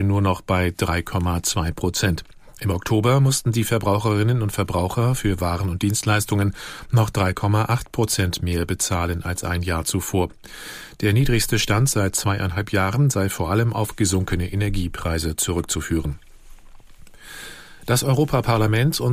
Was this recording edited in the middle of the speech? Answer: no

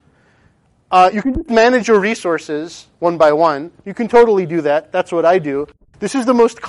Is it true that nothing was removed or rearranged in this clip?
yes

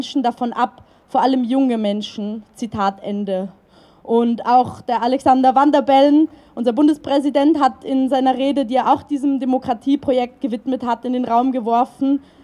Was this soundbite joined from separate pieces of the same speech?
no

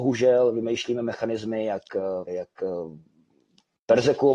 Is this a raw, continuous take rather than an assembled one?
no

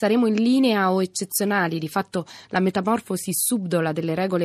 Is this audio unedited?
yes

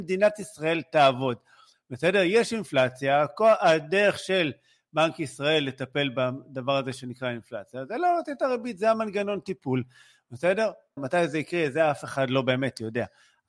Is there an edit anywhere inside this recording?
yes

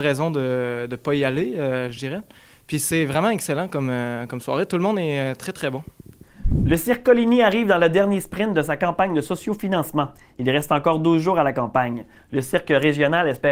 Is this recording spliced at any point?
no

